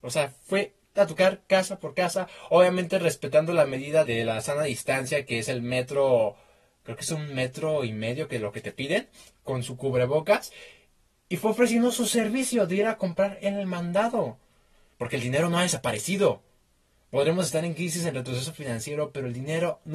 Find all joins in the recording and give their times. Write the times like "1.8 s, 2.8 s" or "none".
4.0 s, 14.9 s